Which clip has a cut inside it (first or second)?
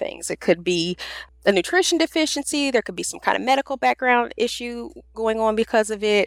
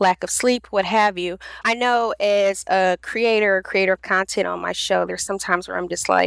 second